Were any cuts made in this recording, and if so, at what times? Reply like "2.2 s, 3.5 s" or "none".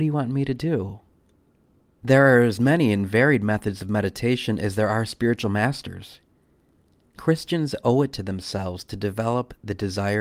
none